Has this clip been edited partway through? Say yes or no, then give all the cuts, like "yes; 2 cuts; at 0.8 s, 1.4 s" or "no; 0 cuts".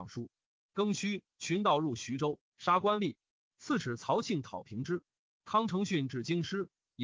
no; 0 cuts